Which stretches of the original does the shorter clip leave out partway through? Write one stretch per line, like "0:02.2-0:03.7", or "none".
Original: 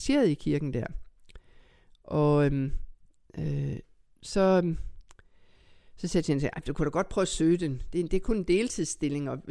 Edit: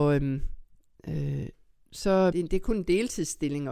0:04.6-0:07.9